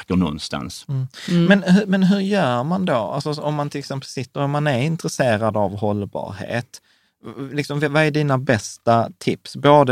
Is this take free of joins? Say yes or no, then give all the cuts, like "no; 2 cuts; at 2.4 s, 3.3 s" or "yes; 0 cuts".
yes; 0 cuts